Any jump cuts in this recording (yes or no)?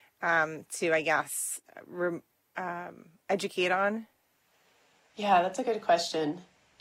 no